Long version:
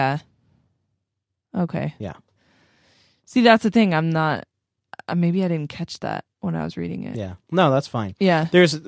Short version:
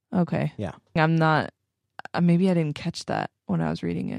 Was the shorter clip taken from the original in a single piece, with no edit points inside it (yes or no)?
no